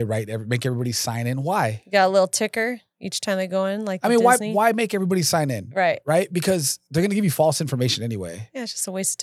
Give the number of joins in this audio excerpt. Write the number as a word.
zero